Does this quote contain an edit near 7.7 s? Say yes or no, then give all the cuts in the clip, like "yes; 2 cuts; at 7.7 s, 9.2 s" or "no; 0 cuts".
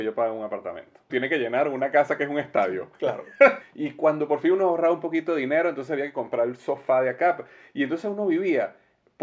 no; 2 cuts; at 1.1 s, 3.6 s